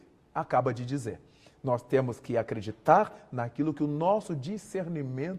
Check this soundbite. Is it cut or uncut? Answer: uncut